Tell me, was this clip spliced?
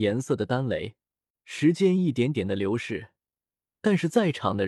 yes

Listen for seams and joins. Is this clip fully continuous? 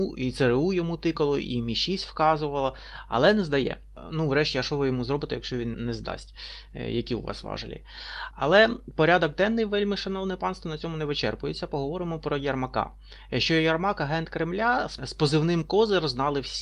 no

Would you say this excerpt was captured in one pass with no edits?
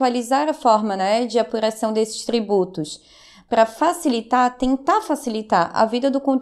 yes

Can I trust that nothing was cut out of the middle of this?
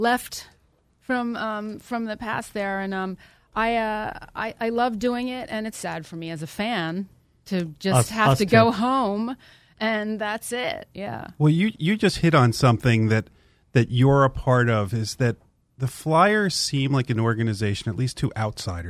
no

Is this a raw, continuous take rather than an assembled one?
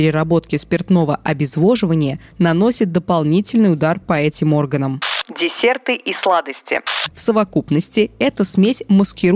no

